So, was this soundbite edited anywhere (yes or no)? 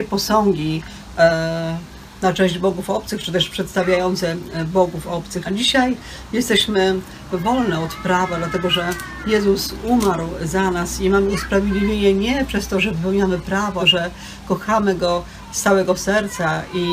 yes